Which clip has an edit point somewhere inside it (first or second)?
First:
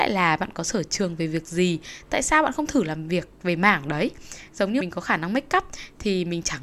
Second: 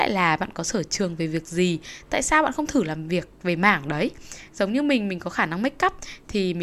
first